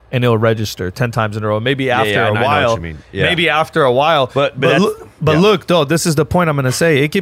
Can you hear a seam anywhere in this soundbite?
no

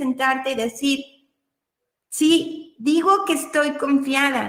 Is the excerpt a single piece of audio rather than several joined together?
yes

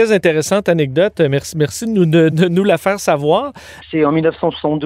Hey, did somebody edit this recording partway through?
yes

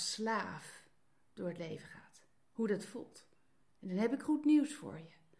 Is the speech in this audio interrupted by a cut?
yes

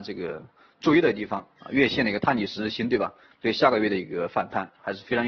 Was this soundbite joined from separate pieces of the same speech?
yes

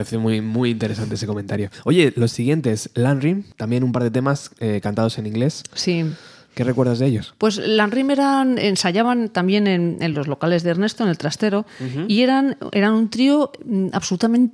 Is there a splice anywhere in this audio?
no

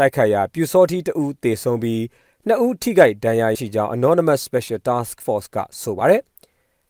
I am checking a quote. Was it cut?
yes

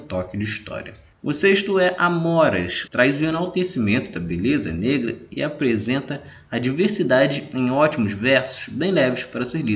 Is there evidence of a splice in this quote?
yes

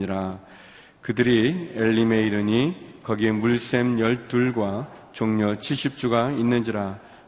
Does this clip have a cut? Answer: no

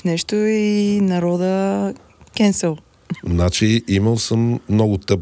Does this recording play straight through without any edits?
yes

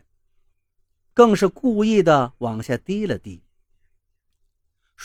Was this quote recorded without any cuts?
no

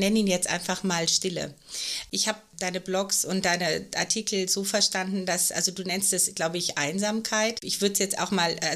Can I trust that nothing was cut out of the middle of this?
yes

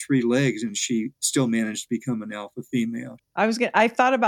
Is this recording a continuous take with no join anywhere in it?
no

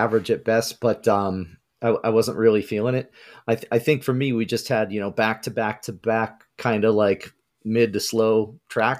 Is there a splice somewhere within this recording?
no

